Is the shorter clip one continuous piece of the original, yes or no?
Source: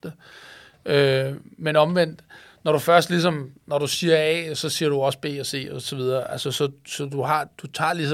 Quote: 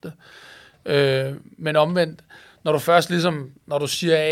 yes